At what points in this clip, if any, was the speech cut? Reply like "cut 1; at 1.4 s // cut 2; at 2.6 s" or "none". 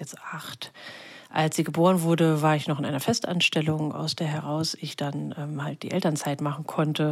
none

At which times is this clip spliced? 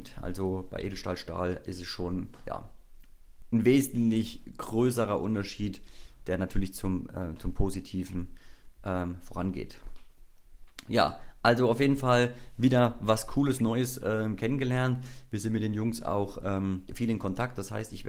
cut 1; at 16.9 s

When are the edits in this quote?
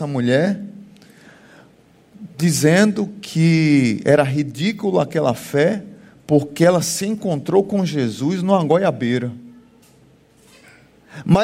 none

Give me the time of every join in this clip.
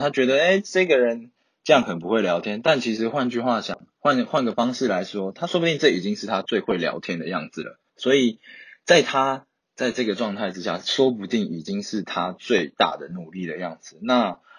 cut 1; at 7.9 s

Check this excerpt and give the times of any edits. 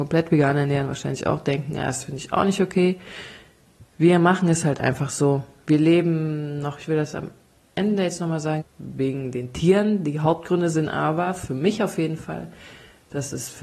cut 1; at 8.6 s

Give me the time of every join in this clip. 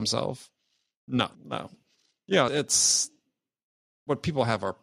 cut 1; at 1.3 s // cut 2; at 2.5 s

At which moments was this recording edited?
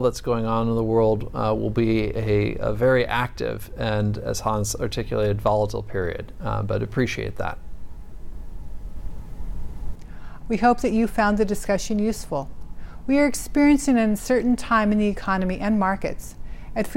cut 1; at 10.4 s

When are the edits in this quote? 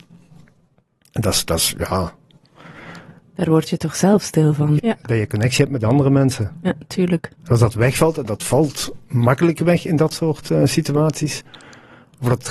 cut 1; at 4.8 s

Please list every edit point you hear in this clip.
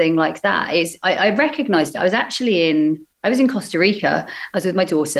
cut 1; at 3.1 s

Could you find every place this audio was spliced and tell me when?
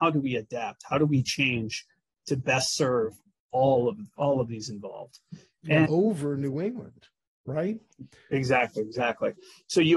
cut 1; at 5.9 s

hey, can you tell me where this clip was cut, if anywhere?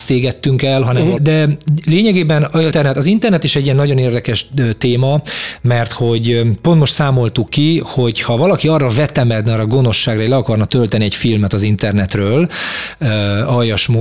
cut 1; at 1.2 s // cut 2; at 2.7 s

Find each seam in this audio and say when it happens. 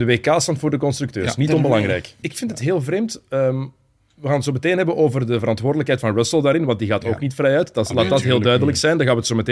cut 1; at 2.2 s

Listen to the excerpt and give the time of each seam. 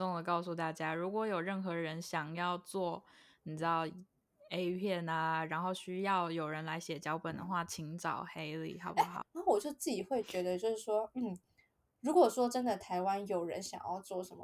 cut 1; at 9.2 s

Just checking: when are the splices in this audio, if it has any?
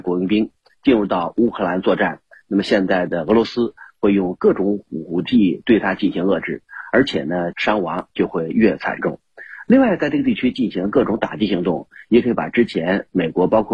cut 1; at 7.5 s

